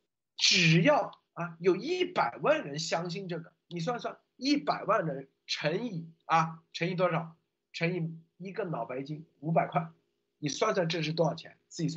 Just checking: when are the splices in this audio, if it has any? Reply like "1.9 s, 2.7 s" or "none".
1.3 s